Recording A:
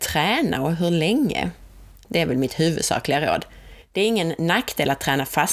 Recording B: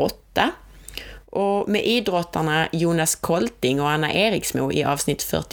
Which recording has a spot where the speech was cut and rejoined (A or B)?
A